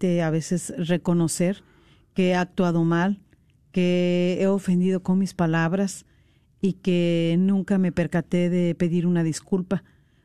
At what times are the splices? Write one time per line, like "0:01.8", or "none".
none

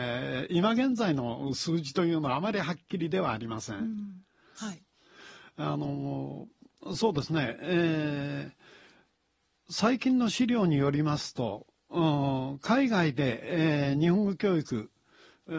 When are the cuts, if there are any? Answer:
0:04.6

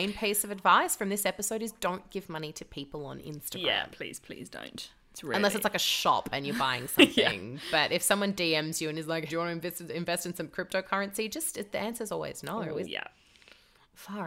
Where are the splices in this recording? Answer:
0:09.3
0:12.8

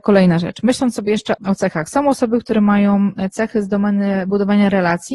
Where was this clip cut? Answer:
0:01.4

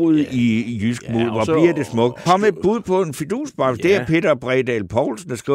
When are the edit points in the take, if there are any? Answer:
0:02.3

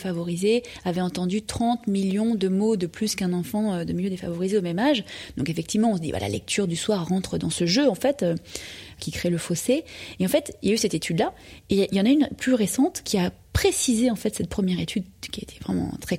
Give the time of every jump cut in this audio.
none

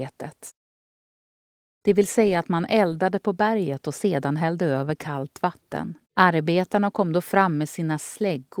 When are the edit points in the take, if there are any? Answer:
0:01.6
0:06.0

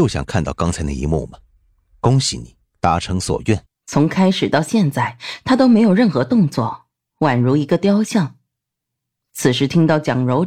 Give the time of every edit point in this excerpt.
0:03.7

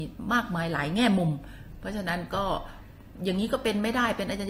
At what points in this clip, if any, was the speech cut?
0:03.2

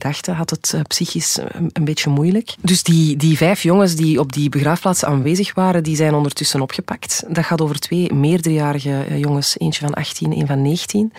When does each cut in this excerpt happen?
0:02.6

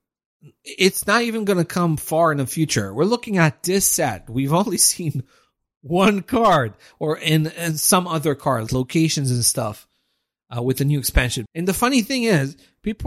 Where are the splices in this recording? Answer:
0:08.7
0:11.5

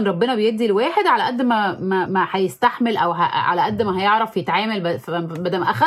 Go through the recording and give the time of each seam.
0:02.1

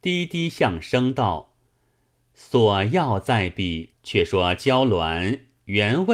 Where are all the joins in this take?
0:03.9

